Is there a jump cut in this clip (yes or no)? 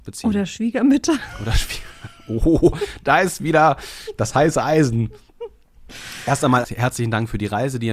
yes